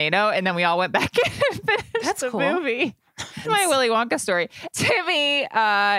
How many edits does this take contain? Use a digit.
2